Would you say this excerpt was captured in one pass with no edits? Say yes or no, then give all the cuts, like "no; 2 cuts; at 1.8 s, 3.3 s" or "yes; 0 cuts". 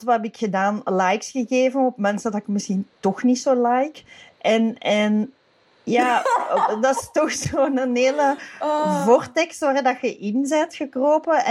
yes; 0 cuts